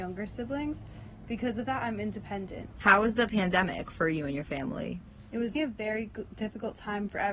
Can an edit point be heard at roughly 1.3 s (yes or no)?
no